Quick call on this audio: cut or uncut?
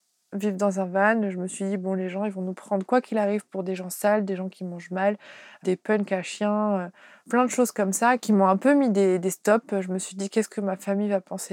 uncut